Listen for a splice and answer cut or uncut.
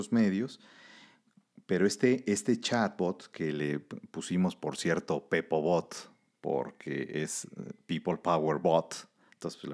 uncut